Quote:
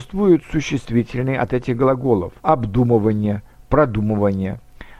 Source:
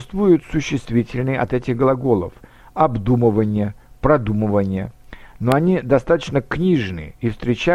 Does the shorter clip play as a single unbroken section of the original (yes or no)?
no